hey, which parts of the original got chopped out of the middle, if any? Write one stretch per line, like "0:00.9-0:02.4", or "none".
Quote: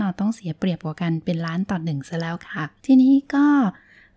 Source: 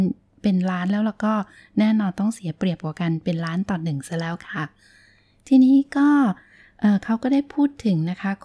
0:04.8-0:05.4